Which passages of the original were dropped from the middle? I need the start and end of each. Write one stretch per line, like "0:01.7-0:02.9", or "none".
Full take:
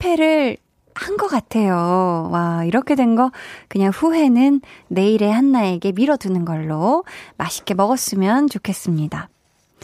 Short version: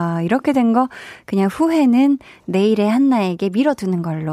none